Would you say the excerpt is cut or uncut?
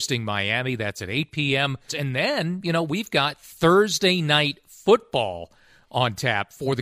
cut